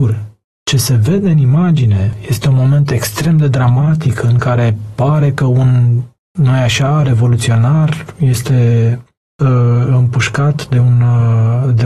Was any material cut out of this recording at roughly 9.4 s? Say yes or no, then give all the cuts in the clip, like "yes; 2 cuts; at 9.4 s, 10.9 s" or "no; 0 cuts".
no; 0 cuts